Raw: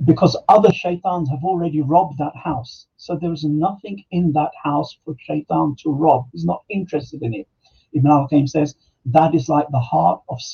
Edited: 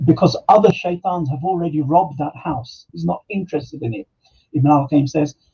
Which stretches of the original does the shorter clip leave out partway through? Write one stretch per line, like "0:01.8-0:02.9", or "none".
0:02.9-0:06.3